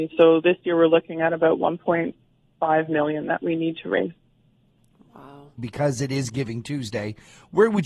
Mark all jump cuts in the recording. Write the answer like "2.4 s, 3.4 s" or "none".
5.6 s